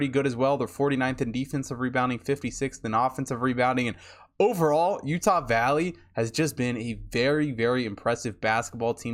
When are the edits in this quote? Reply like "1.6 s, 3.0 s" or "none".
none